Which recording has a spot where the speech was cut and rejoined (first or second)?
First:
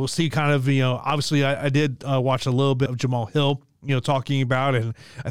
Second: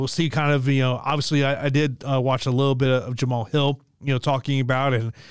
first